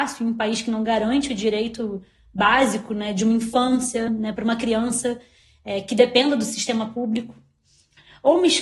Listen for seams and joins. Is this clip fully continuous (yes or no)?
yes